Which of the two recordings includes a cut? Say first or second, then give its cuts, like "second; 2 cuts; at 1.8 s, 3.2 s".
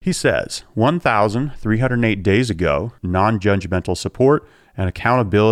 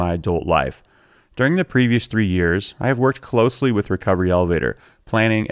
first; 1 cut; at 3.0 s